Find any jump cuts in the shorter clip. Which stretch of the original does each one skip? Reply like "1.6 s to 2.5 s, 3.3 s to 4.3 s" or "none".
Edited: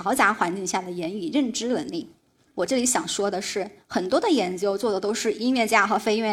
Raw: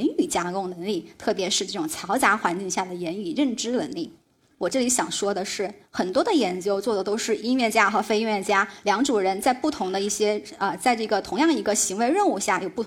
none